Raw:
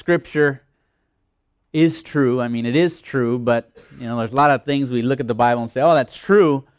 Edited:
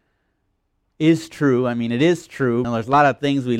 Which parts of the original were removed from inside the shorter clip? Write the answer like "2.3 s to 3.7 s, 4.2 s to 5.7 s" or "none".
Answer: 3.4 s to 4.1 s